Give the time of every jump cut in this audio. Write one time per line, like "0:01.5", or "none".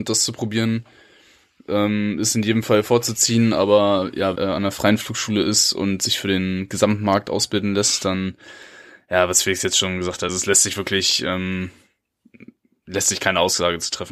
0:04.4
0:10.3